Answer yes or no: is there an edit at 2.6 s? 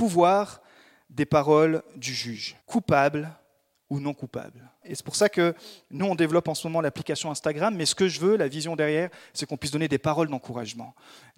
yes